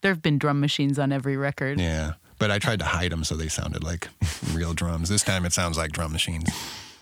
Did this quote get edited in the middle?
no; 0 cuts

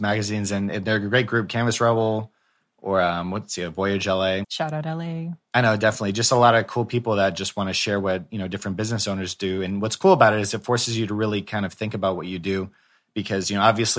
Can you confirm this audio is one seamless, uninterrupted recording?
no; 1 cut; at 4.4 s

